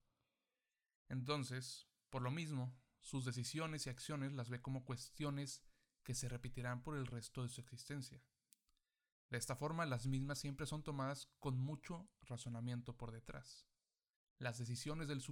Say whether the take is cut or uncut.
uncut